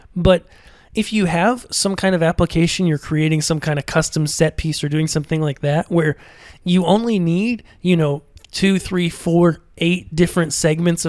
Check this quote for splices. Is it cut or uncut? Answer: uncut